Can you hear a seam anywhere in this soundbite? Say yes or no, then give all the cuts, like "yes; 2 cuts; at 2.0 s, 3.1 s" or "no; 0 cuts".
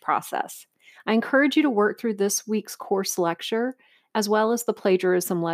yes; 2 cuts; at 0.9 s, 4.1 s